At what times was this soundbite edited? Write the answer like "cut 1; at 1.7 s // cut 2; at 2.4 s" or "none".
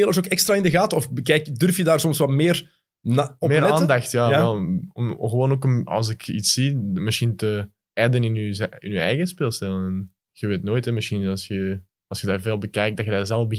none